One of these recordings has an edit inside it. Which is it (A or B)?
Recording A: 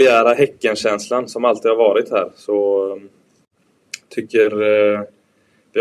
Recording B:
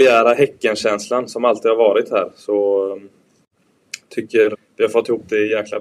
B